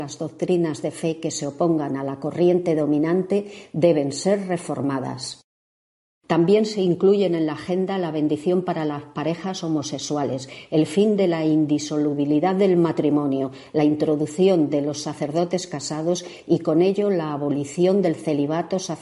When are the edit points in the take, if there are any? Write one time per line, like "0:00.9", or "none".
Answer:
0:06.2